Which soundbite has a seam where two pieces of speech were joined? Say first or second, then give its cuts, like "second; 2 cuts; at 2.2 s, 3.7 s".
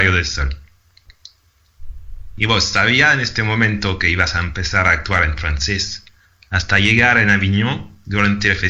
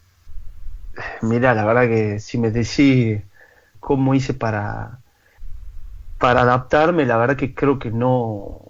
second; 1 cut; at 3.7 s